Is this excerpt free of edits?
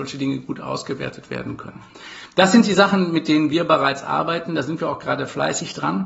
yes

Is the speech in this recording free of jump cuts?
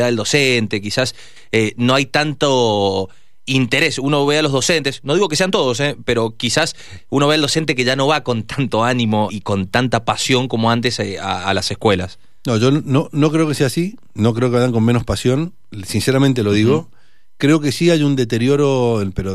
no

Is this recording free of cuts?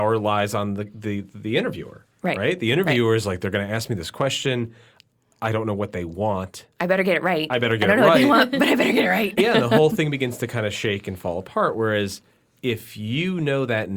no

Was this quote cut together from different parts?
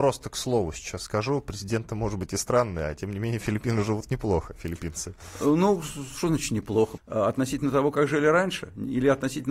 yes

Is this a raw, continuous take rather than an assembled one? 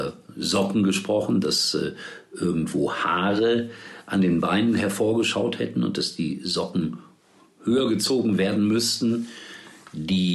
yes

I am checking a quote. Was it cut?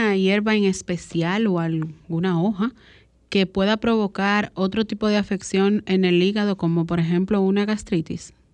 no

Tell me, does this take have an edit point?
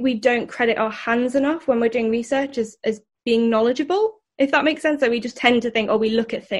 no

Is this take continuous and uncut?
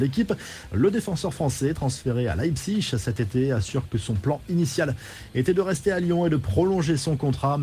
yes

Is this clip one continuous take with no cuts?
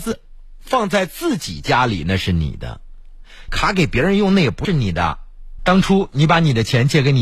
no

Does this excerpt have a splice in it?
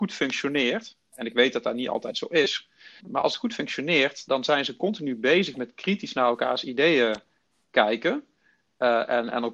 yes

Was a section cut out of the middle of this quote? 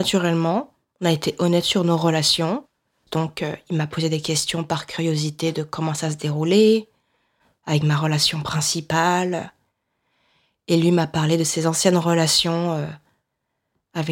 yes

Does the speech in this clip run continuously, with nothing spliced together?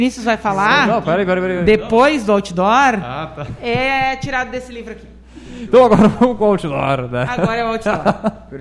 yes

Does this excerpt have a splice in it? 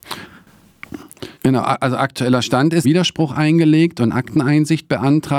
yes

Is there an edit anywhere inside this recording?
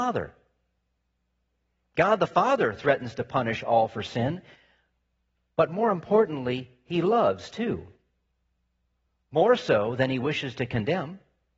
no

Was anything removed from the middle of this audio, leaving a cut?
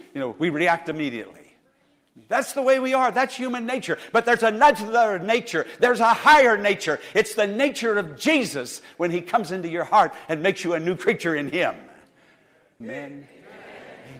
yes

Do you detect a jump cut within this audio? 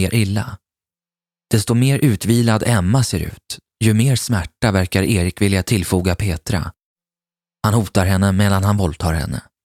no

